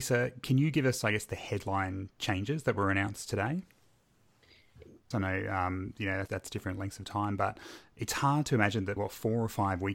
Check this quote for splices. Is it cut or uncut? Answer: cut